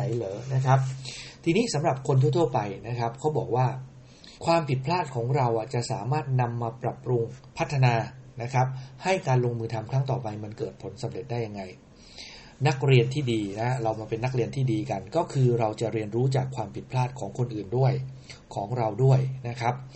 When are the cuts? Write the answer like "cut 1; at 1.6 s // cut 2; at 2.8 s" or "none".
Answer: cut 1; at 4.4 s // cut 2; at 7.5 s